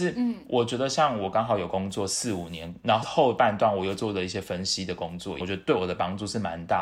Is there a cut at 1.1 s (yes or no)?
no